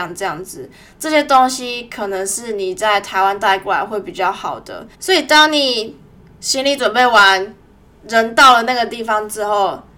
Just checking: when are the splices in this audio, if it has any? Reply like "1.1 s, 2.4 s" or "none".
4.9 s